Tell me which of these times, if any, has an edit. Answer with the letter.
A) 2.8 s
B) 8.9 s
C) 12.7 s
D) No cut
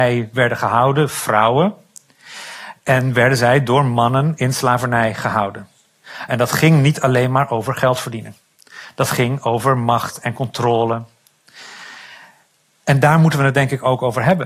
D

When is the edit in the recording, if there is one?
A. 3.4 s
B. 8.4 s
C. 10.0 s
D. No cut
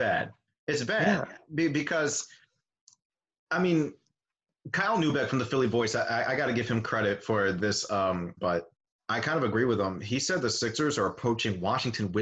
B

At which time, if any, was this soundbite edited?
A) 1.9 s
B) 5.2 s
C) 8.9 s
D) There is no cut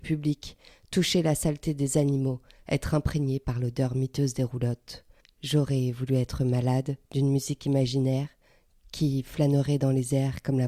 B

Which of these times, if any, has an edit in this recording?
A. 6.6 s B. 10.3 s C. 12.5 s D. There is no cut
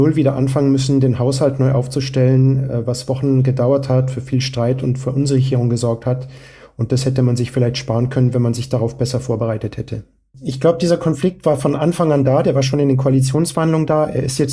B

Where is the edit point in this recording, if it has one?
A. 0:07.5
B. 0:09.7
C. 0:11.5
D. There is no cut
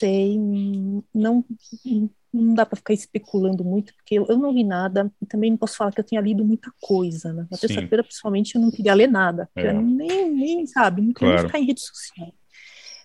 D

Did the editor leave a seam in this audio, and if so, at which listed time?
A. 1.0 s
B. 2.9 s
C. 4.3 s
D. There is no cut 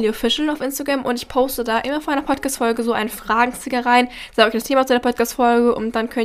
D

